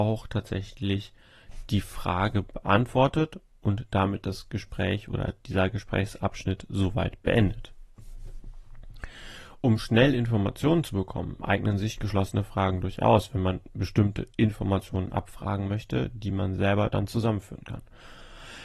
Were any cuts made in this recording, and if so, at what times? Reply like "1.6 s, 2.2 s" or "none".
none